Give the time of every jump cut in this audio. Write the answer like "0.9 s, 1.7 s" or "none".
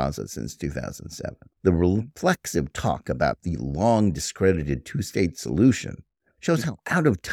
1.6 s